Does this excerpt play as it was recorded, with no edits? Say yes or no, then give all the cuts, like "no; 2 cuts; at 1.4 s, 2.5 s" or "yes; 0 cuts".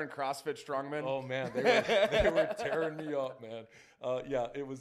yes; 0 cuts